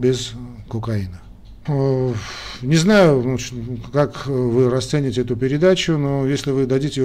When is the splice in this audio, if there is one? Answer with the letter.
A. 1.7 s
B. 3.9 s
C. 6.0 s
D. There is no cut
A